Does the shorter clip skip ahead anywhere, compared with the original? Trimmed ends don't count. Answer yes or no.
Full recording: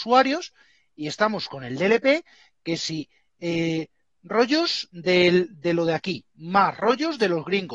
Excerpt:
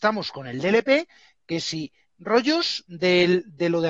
yes